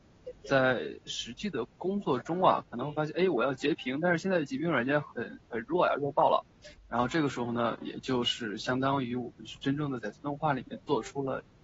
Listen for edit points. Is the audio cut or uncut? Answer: cut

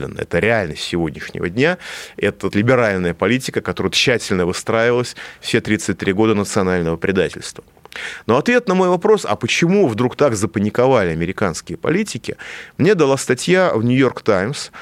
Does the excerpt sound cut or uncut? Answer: cut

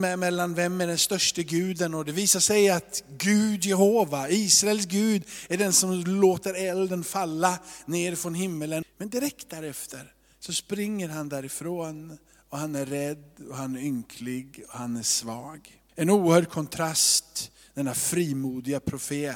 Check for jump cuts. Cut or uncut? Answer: cut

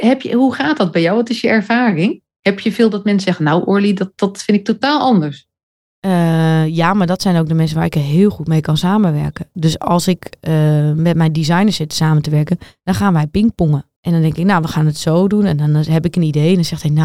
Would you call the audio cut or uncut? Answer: cut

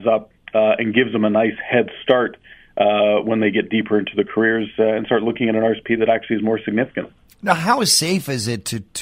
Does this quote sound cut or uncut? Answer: uncut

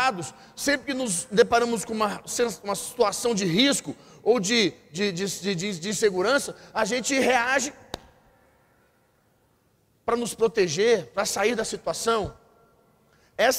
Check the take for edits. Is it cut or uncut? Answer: uncut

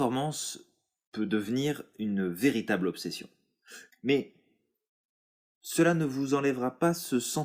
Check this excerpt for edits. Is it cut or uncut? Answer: cut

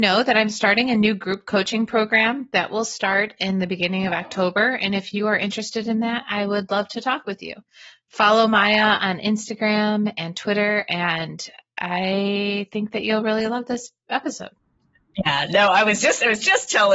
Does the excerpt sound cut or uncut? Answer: uncut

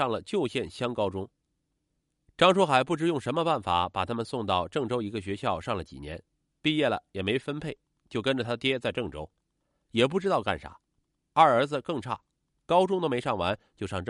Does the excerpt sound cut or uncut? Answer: uncut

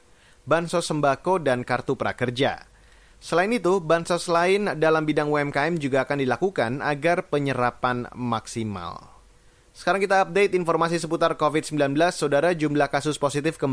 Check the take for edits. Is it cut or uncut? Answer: uncut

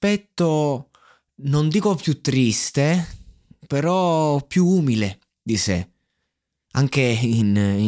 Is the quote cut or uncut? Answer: uncut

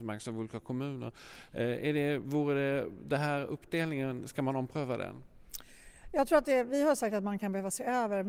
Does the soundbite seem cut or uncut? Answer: uncut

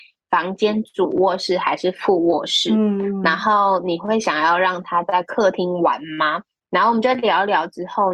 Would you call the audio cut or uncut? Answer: uncut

